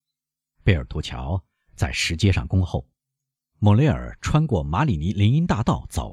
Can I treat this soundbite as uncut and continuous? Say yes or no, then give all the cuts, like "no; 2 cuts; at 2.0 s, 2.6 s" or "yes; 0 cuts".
yes; 0 cuts